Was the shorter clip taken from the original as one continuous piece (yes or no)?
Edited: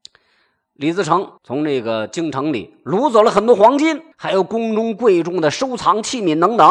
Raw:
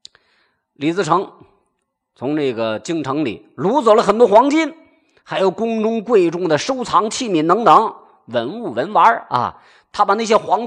no